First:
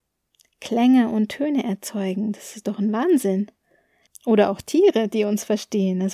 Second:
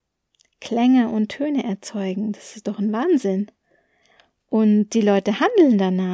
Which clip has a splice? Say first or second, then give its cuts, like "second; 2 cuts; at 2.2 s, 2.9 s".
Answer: first; 1 cut; at 4.1 s